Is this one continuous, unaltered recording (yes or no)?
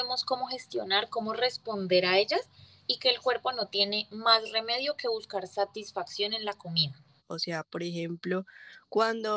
no